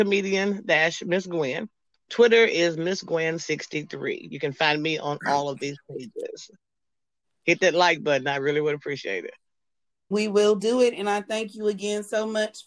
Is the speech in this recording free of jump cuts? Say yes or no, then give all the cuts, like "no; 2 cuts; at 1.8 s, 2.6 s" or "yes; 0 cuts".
no; 1 cut; at 10.1 s